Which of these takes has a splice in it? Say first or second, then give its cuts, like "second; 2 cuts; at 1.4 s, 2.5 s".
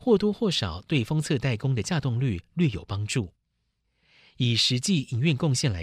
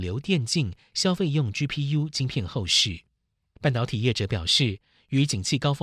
second; 1 cut; at 3.6 s